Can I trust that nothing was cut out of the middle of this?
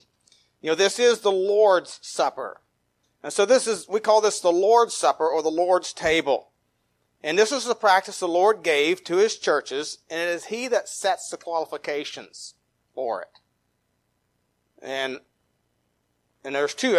no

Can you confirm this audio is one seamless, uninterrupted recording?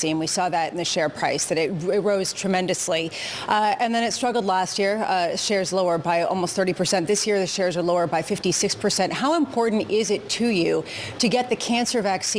yes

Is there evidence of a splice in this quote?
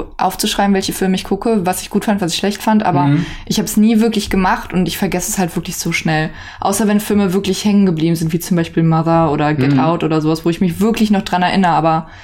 no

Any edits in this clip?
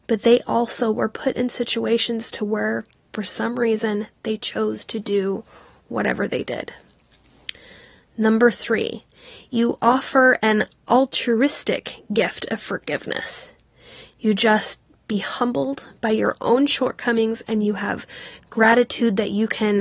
no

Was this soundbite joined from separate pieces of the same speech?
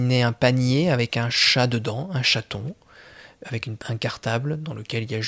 yes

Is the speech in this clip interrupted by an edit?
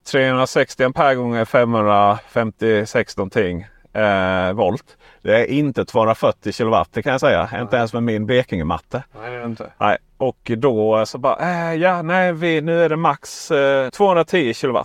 yes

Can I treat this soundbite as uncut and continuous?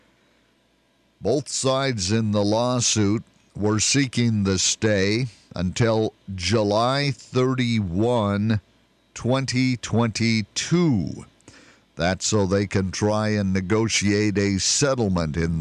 yes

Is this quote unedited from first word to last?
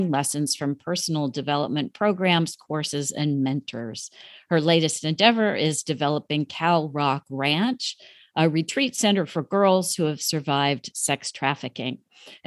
yes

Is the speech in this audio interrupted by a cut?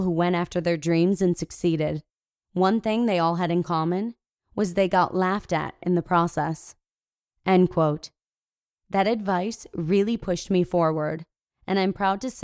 no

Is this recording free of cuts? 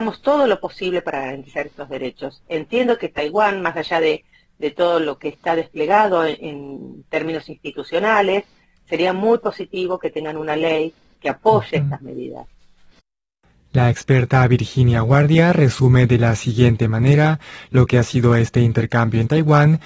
yes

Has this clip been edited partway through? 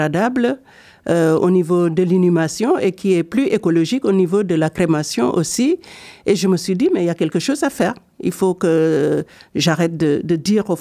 no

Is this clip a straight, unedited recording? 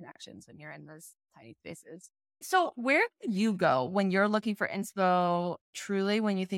no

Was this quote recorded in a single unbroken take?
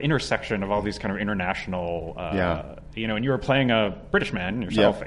yes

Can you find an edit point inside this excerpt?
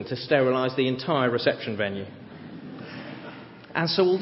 no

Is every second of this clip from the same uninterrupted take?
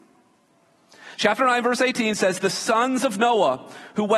yes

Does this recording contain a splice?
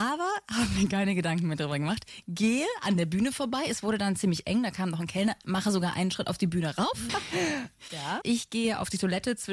yes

